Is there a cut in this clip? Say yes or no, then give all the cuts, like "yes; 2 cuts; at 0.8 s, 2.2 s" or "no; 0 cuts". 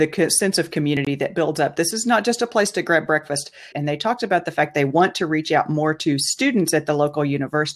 yes; 1 cut; at 3.7 s